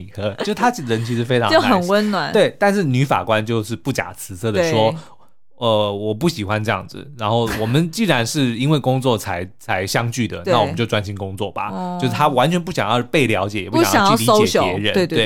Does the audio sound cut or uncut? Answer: uncut